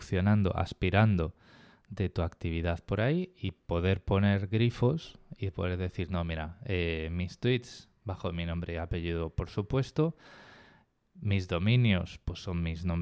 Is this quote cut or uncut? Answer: uncut